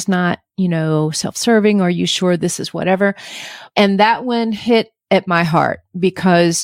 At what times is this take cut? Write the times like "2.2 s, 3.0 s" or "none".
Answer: 3.7 s